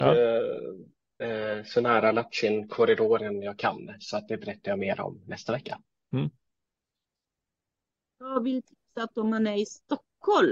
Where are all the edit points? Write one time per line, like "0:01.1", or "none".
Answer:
0:01.2